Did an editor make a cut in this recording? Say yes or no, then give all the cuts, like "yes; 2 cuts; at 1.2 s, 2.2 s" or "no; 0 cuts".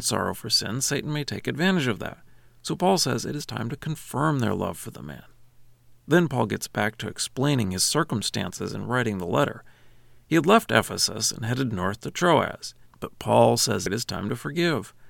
yes; 2 cuts; at 12.9 s, 13.9 s